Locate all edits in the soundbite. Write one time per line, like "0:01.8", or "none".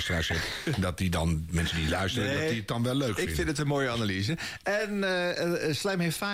none

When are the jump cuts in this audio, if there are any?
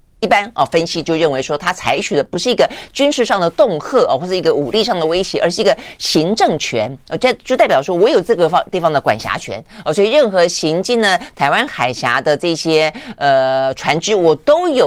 none

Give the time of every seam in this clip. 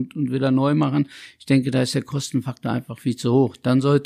none

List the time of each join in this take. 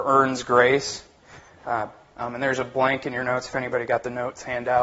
0:02.1

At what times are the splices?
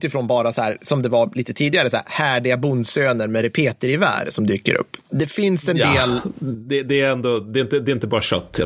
0:05.0

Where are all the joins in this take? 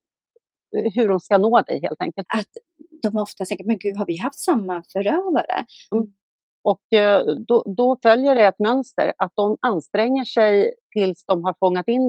0:02.2
0:05.9

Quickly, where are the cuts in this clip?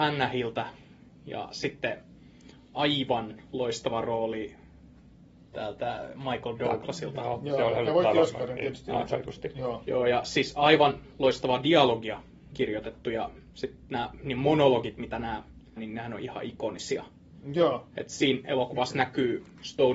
0:15.8

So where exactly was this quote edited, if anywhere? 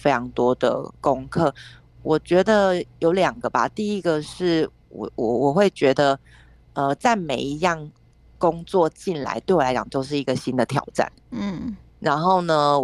none

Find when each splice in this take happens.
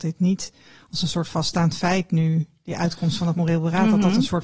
none

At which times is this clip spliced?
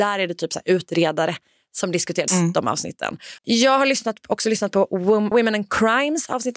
0:02.3
0:03.4
0:05.3

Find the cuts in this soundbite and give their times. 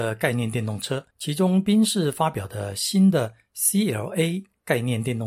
0:01.1

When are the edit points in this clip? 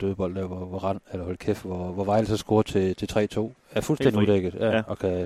0:03.6

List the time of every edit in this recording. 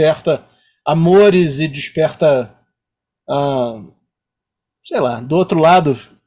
none

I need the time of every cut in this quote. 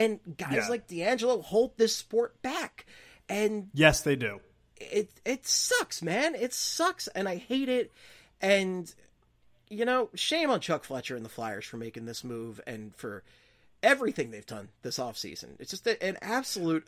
none

